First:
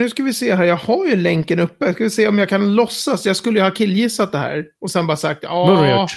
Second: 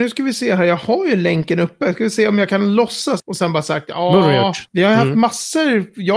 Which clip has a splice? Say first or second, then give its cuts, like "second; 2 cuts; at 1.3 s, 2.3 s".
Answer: second; 2 cuts; at 3.2 s, 4.7 s